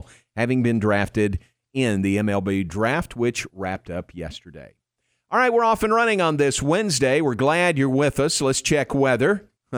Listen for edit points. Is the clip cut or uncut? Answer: uncut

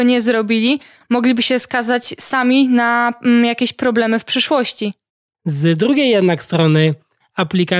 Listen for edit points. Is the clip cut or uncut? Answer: cut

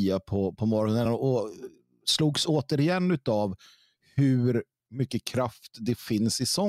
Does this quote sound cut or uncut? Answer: uncut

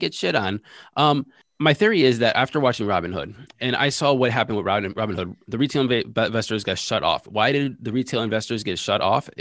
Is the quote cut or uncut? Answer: uncut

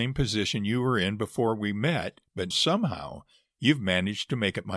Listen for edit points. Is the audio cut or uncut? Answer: cut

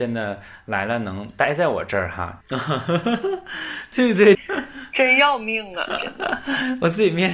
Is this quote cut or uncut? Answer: cut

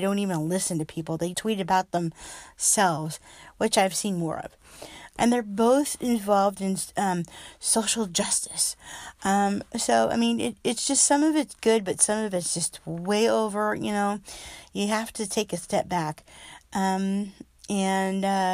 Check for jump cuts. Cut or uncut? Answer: cut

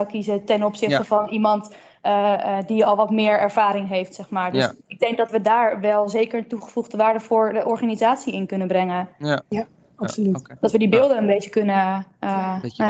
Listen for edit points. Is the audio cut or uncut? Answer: uncut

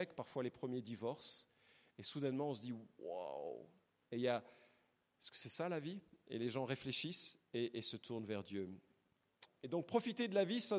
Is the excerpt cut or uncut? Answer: cut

